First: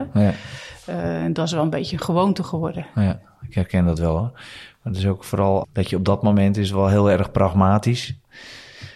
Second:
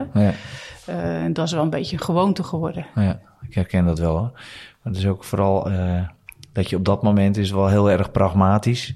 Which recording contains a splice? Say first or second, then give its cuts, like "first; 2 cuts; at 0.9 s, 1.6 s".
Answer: first; 1 cut; at 5.6 s